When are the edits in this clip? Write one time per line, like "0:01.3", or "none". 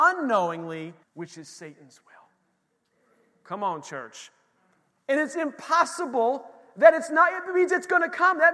0:01.0
0:04.9